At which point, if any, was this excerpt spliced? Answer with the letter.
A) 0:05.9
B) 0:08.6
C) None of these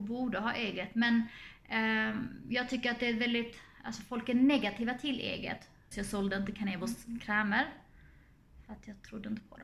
A